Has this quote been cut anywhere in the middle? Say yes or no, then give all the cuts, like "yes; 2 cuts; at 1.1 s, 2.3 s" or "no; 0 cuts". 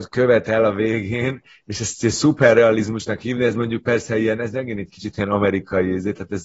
no; 0 cuts